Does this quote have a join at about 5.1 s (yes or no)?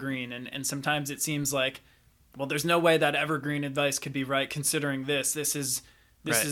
no